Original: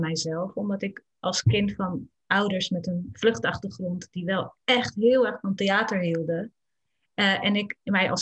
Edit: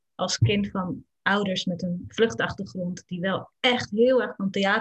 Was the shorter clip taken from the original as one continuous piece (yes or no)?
yes